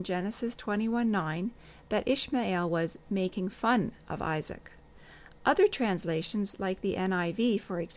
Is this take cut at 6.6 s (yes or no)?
no